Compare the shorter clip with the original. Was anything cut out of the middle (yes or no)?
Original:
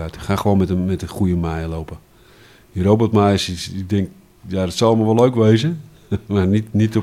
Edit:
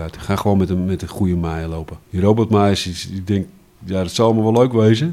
yes